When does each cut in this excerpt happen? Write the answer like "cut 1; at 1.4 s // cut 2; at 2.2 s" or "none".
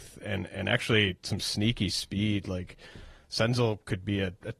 none